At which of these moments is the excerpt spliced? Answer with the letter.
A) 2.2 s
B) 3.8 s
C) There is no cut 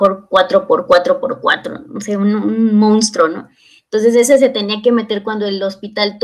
C